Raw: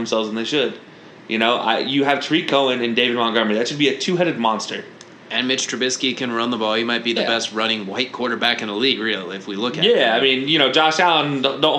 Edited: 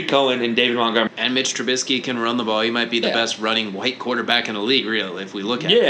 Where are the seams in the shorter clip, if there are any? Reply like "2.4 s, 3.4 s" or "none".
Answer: 1.1 s